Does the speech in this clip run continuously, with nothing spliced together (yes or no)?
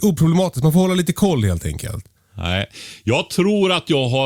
yes